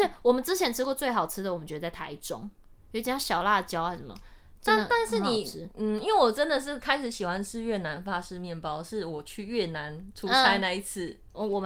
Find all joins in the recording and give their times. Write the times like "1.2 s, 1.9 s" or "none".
none